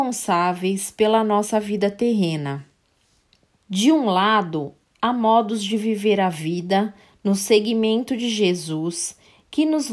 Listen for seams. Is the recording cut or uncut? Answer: cut